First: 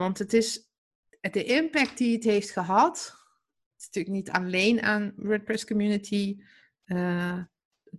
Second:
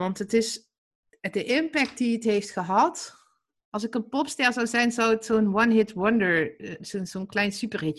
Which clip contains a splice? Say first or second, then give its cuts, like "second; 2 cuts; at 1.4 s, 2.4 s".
second; 2 cuts; at 3.6 s, 6.8 s